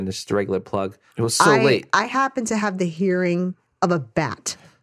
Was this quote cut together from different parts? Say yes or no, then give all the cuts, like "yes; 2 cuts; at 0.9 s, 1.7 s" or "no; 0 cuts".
yes; 1 cut; at 1.1 s